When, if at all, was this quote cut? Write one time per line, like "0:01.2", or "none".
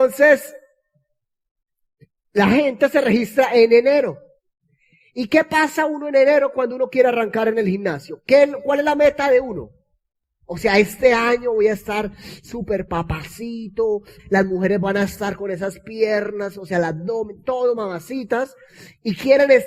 0:14.2